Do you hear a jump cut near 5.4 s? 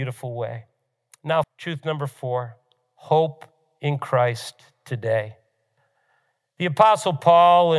no; 1 cut; at 1.4 s

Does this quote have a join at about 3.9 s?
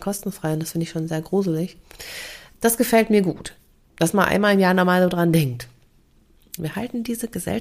no; 2 cuts; at 2.5 s, 6.6 s

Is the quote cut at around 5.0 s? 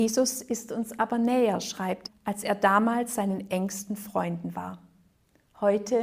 no; 1 cut; at 2.1 s

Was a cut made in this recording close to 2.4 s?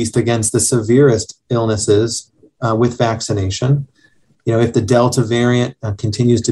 no; 1 cut; at 4.3 s

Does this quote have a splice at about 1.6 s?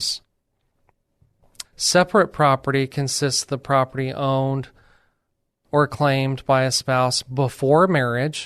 yes; 1 cut; at 1.6 s

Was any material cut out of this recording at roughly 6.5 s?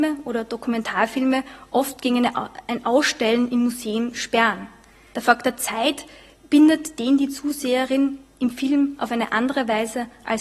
no; 1 cut; at 5.1 s

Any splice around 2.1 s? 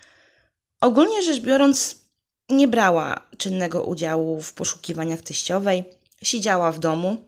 no; 0 cuts

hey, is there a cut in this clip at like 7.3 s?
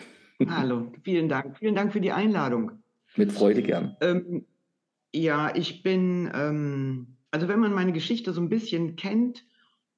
yes; 1 cut; at 7.3 s

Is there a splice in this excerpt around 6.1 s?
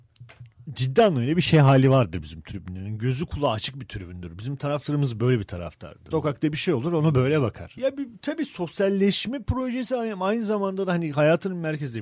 yes; 2 cuts; at 6.1 s, 7.8 s

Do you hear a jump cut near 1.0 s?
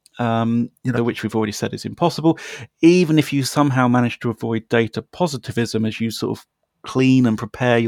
yes; 1 cut; at 1.0 s

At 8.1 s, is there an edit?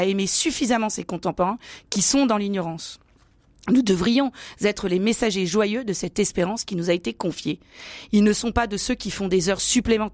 yes; 1 cut; at 8.1 s

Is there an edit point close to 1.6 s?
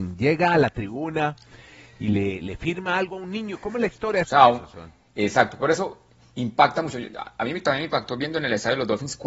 no; 1 cut; at 4.2 s

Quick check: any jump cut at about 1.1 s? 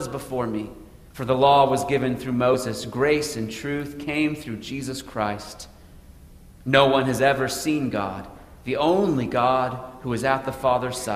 yes; 1 cut; at 1.1 s

